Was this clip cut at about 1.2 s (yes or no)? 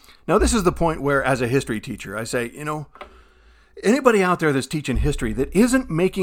no